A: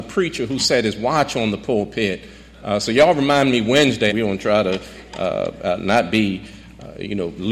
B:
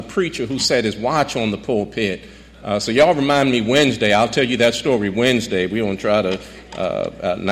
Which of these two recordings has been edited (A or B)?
A